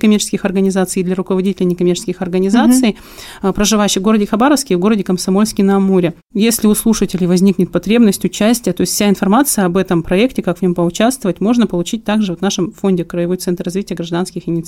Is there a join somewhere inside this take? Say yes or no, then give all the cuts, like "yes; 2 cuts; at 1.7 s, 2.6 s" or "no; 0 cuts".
no; 0 cuts